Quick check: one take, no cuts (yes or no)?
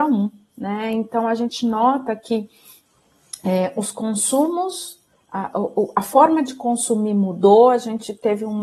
yes